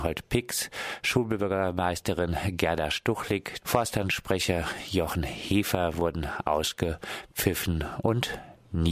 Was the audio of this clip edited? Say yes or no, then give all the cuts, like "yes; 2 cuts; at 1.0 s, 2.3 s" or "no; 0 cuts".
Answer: yes; 1 cut; at 3.6 s